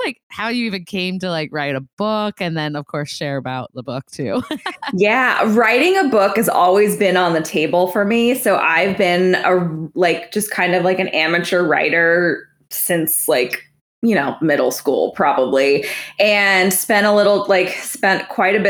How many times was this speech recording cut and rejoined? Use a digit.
0